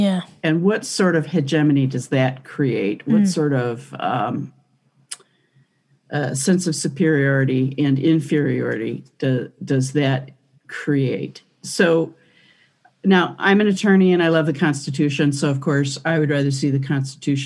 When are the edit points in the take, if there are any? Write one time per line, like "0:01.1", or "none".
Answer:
none